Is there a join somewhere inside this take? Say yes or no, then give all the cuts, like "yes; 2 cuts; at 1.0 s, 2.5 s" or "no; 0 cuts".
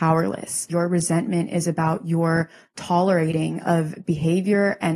no; 0 cuts